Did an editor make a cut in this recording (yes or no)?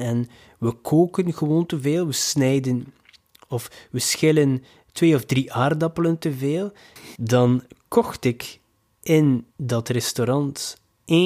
yes